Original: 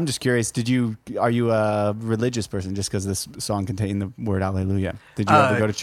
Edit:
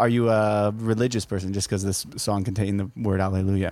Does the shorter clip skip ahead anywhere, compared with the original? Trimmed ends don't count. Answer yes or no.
no